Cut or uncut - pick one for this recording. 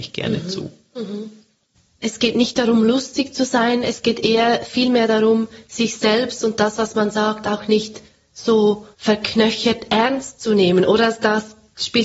cut